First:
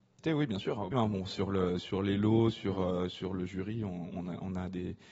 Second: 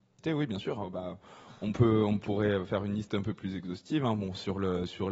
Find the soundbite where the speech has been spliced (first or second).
first